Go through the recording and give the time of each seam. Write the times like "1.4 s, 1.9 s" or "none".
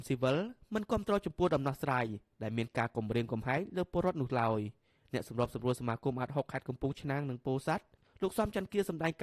none